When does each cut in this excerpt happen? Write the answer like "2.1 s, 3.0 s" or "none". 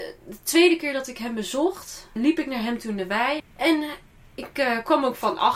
2.2 s, 3.4 s